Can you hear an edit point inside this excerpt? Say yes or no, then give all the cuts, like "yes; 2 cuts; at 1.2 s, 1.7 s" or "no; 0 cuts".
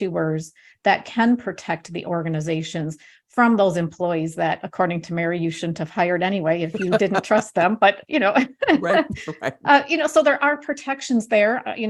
no; 0 cuts